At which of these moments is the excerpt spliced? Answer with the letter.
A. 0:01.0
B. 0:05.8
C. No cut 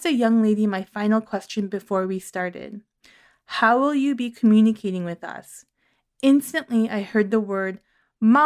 C